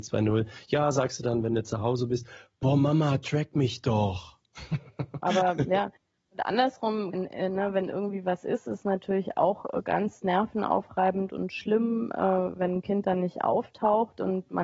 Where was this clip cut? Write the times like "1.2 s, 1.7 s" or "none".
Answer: 5.2 s, 7.1 s